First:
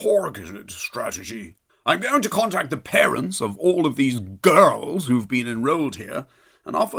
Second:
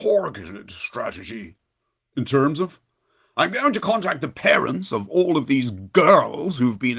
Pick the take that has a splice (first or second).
first